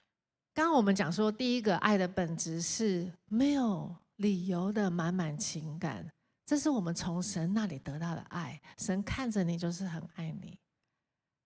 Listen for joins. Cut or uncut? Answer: uncut